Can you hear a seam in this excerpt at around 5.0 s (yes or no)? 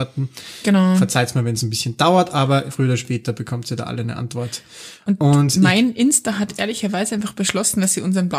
no